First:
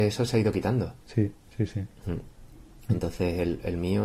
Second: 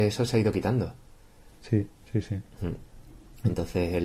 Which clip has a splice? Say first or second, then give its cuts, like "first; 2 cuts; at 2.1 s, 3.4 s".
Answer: first; 1 cut; at 1.0 s